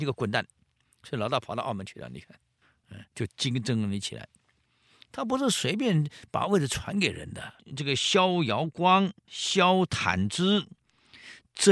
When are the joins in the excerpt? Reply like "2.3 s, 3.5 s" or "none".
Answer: 7.6 s, 9.2 s